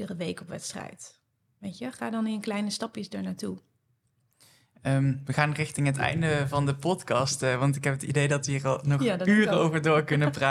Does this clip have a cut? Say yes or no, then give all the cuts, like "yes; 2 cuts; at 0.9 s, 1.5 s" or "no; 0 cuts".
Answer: no; 0 cuts